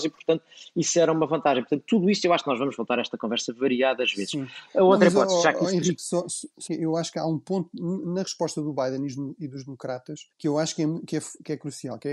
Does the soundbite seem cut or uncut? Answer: cut